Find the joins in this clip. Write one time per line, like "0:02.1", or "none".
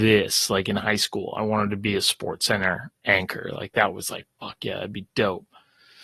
none